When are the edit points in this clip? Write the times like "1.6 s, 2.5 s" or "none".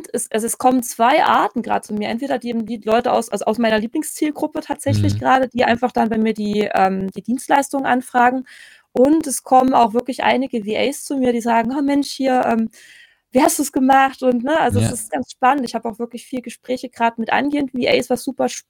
15.1 s, 17.1 s